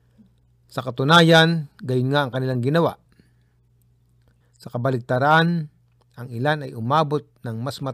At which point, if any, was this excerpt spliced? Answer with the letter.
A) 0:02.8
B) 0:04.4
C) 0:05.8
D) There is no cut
B